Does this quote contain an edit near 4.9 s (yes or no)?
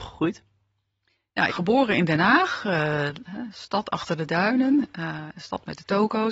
no